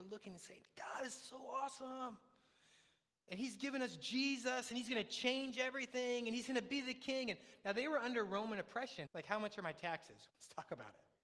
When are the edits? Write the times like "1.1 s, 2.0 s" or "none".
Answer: 9.1 s, 10.3 s